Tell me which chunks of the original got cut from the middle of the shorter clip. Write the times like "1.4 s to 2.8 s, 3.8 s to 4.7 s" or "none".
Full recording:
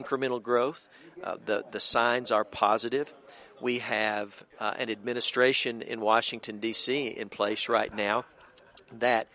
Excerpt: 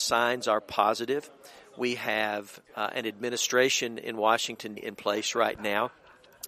6.6 s to 7.1 s